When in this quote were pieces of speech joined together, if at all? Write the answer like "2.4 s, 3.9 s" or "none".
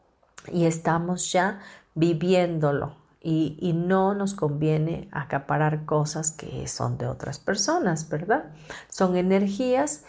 none